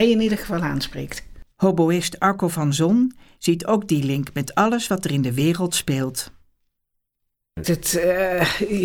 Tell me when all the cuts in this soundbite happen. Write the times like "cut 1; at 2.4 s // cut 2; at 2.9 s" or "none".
cut 1; at 1.5 s // cut 2; at 7.6 s